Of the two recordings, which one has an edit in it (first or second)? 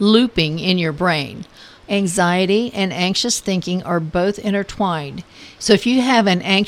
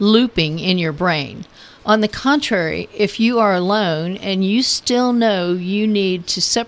first